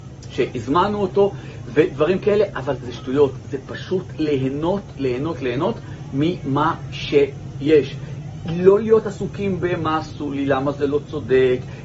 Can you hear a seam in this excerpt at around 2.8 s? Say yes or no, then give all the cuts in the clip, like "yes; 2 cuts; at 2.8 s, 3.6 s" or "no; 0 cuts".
yes; 1 cut; at 2.8 s